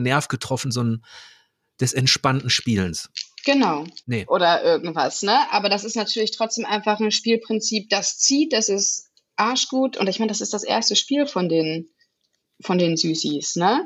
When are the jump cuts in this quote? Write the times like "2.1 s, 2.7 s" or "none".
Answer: 4.0 s